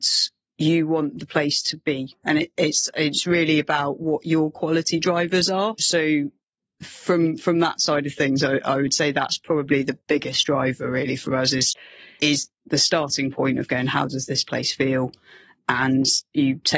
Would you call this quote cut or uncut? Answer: uncut